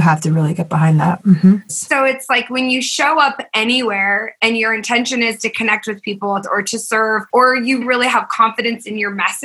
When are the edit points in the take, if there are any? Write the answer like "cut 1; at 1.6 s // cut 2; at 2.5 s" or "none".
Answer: cut 1; at 1.7 s // cut 2; at 6.4 s // cut 3; at 7.8 s